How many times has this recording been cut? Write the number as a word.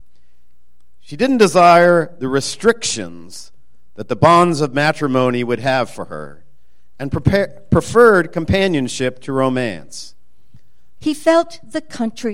two